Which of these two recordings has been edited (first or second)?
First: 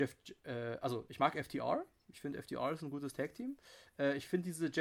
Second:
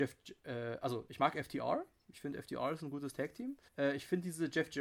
second